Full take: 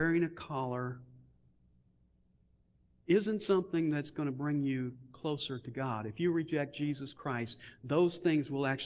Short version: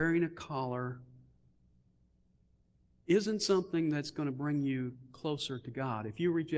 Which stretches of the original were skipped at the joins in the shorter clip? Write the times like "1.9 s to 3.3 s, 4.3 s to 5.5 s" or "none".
none